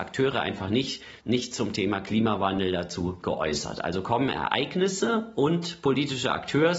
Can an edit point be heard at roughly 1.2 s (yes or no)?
yes